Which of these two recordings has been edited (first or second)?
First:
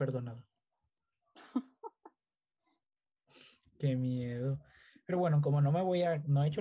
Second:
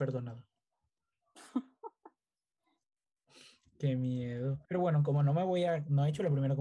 second